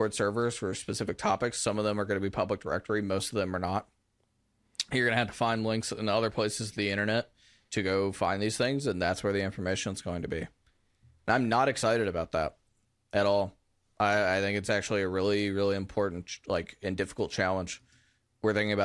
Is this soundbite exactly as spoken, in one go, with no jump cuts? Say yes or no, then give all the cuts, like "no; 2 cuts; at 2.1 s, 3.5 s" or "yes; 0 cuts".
yes; 0 cuts